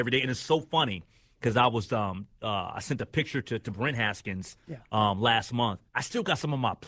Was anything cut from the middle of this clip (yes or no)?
yes